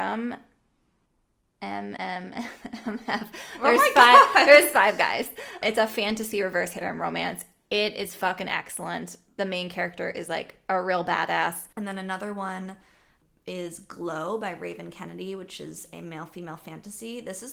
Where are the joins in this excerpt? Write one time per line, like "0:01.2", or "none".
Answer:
0:02.0
0:11.7